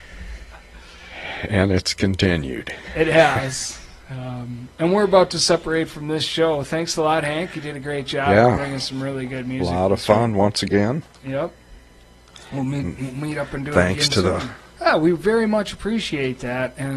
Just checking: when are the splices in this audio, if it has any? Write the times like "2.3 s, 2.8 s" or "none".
14.8 s